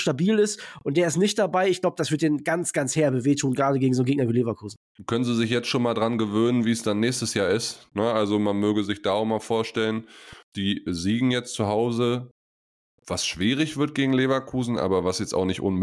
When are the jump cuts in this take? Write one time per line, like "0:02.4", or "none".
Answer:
0:07.9